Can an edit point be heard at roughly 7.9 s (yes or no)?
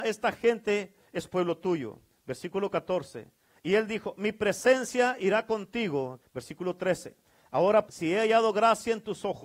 yes